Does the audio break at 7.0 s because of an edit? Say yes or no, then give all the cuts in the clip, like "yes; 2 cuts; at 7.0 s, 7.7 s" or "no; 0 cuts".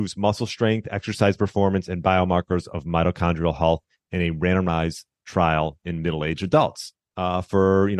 yes; 1 cut; at 7.0 s